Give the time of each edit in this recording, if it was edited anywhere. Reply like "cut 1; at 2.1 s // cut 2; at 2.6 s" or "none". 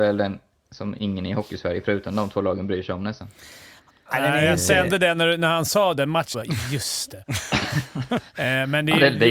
cut 1; at 6.3 s